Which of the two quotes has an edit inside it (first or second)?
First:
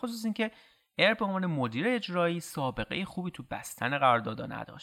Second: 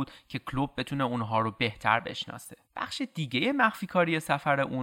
second